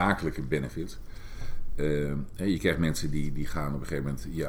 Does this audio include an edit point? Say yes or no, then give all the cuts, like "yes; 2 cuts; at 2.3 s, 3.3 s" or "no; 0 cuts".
no; 0 cuts